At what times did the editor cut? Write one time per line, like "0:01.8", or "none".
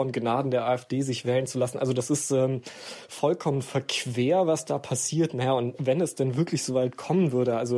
none